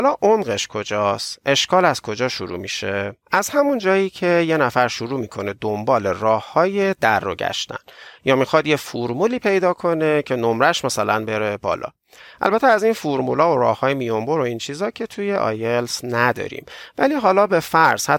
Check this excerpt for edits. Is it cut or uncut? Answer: cut